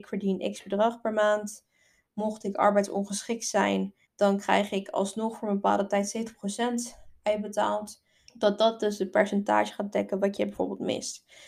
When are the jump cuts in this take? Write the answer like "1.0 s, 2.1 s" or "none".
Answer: 4.0 s, 8.3 s